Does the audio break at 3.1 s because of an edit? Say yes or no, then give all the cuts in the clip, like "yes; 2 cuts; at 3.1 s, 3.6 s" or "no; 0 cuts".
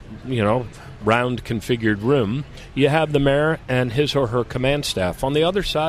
no; 1 cut; at 1.0 s